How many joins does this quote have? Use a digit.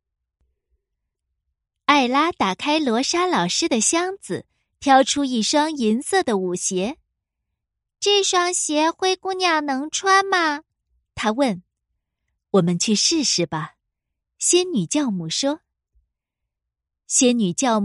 0